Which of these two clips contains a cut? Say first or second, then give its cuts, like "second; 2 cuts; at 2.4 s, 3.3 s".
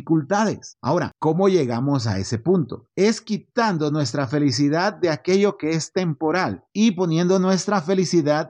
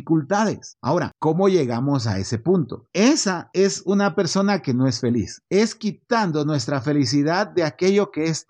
second; 2 cuts; at 2.9 s, 5.4 s